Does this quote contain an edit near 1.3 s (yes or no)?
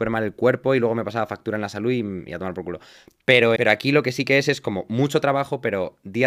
no